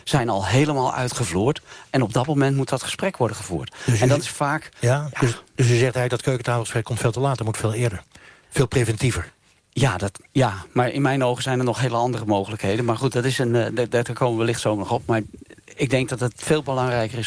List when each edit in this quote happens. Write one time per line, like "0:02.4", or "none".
none